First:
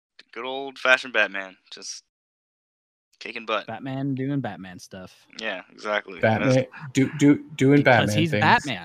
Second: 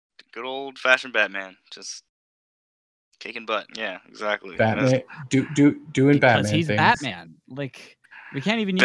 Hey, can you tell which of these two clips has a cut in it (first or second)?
second